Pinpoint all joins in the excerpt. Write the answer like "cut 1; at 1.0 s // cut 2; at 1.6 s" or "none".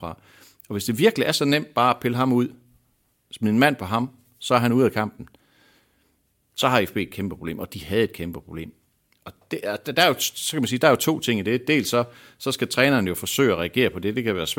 none